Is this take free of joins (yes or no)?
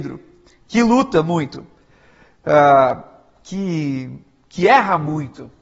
yes